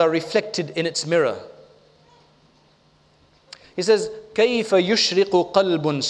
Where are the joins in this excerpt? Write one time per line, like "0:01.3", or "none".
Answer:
0:03.6